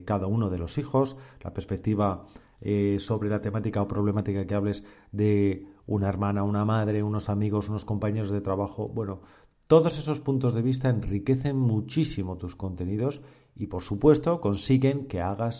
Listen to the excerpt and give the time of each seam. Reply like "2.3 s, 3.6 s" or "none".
none